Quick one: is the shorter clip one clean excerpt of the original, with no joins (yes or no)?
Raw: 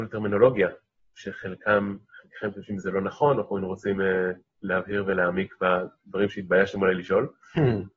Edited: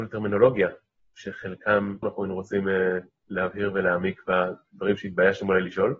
no